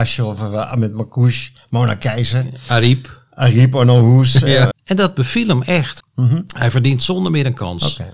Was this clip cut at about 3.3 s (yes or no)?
no